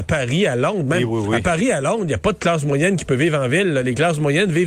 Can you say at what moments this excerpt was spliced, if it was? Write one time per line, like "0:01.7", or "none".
none